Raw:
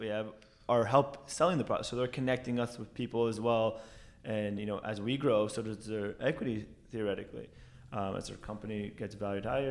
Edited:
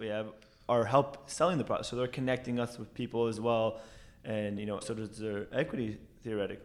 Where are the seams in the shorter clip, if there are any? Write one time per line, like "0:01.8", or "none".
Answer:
0:04.8